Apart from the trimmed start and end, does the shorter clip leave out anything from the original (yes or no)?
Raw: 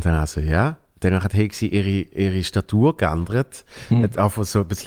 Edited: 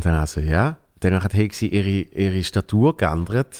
no